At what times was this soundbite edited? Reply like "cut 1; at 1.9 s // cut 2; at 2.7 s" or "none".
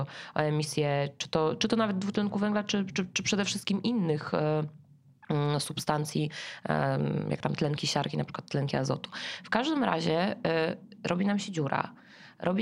none